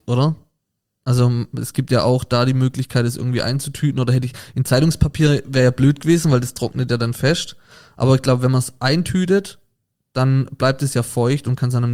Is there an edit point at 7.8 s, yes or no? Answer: no